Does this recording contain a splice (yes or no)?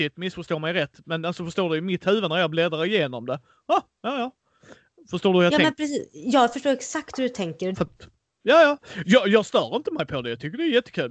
yes